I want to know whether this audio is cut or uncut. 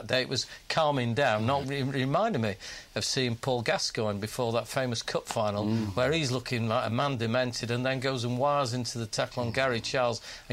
cut